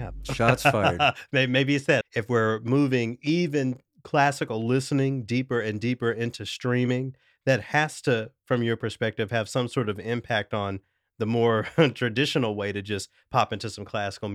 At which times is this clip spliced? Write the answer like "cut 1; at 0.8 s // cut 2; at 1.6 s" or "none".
cut 1; at 2.0 s

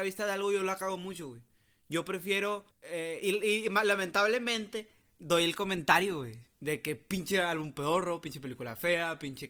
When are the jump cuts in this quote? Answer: cut 1; at 2.7 s

